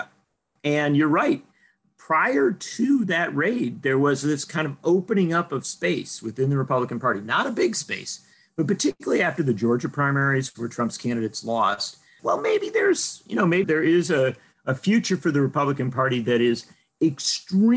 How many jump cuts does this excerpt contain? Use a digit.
2